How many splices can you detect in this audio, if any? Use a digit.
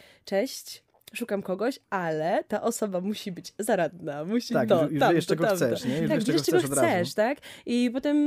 0